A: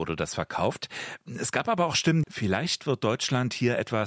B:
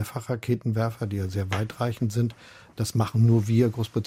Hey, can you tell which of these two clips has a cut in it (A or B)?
A